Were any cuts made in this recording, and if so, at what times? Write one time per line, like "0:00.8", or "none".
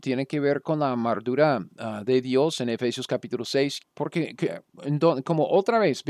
0:03.8